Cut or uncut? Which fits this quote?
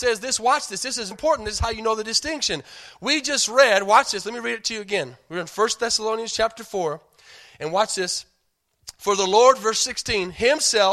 cut